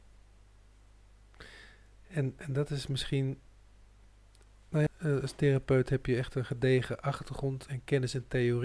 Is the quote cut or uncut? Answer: cut